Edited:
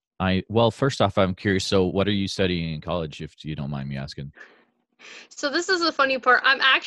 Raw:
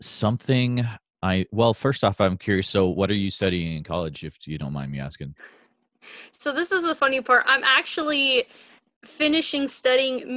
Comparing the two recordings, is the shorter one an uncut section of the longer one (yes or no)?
yes